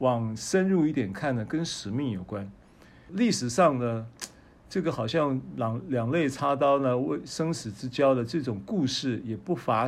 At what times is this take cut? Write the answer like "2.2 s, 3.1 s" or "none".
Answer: 3.1 s

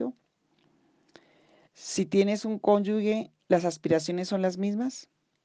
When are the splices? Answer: 1.7 s

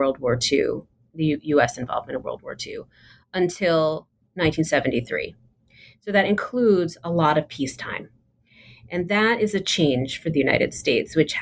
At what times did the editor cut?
none

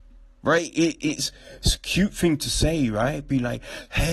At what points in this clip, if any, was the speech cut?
none

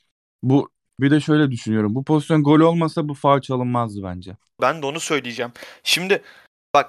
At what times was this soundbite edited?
1.0 s, 4.6 s

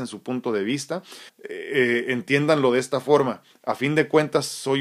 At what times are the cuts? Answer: 1.3 s

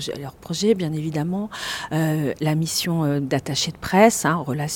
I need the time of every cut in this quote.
none

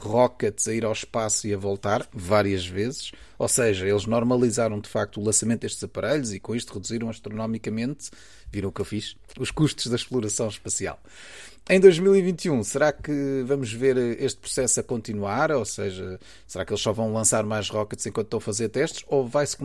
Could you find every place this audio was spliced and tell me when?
none

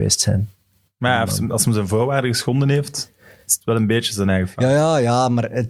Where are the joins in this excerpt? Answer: none

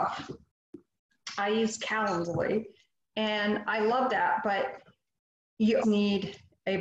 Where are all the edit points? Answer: 5.8 s

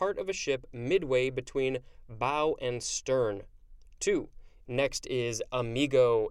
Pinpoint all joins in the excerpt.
4.6 s

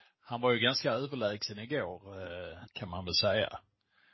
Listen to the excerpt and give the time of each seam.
2.7 s

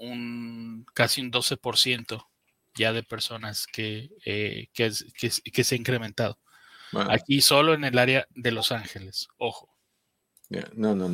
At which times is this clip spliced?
none

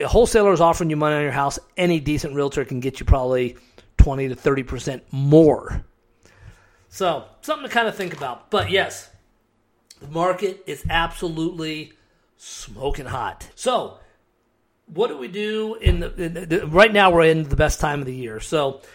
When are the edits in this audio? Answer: 13.5 s

